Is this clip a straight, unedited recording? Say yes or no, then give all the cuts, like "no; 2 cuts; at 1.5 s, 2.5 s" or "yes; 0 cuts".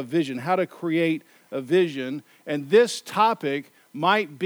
yes; 0 cuts